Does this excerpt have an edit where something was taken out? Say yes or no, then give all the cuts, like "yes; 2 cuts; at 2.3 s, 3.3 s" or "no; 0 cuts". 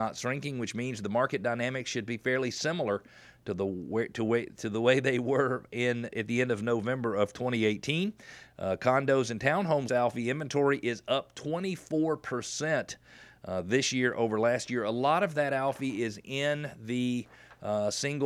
yes; 1 cut; at 9.9 s